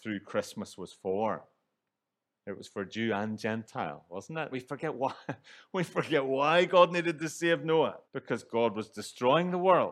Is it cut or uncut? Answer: cut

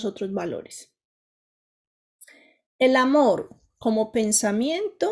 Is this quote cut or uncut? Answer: uncut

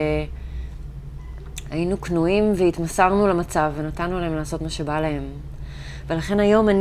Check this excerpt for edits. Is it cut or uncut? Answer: uncut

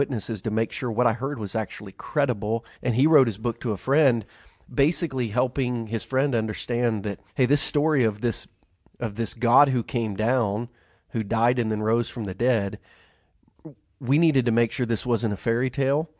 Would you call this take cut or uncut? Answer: cut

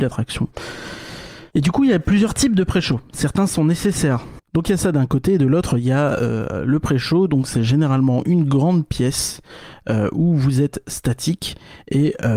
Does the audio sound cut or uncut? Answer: cut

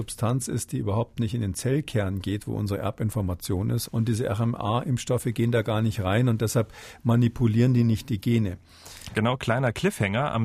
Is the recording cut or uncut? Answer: cut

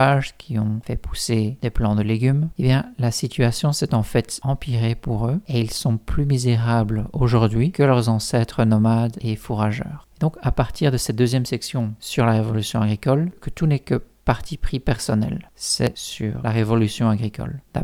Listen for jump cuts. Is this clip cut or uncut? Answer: cut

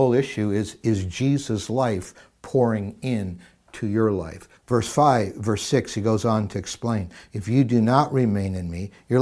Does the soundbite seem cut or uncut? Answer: cut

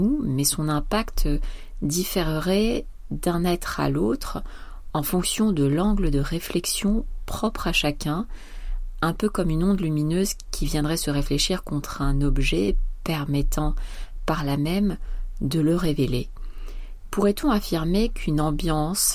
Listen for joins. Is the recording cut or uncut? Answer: uncut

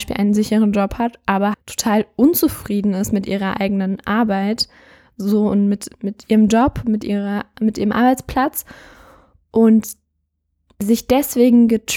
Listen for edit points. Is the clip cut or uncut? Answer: cut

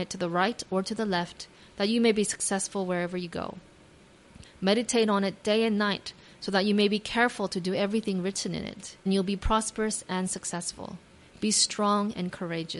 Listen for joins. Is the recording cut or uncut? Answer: cut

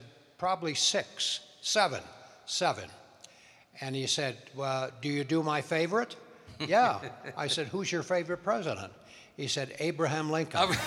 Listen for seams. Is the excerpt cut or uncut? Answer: cut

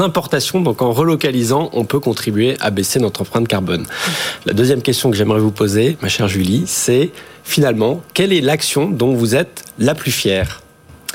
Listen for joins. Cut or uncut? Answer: uncut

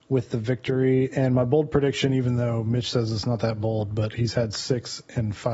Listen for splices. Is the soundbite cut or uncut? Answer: uncut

